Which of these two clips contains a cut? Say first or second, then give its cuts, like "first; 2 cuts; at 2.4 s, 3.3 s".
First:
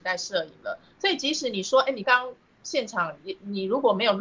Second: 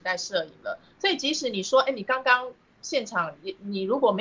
first; 1 cut; at 2.0 s